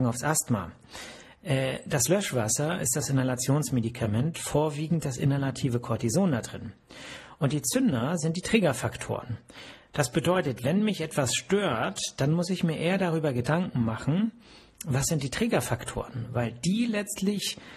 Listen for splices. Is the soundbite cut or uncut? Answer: uncut